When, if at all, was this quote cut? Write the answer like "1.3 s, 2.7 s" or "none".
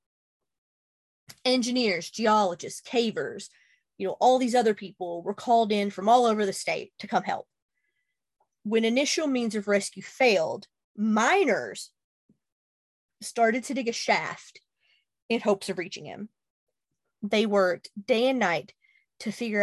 none